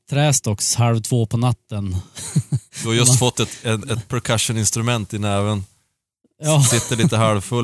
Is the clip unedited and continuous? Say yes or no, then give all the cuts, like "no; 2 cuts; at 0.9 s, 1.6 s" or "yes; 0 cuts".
yes; 0 cuts